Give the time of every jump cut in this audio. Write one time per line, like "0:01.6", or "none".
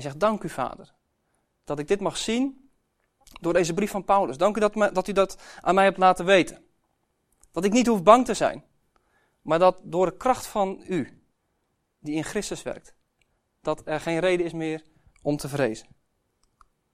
none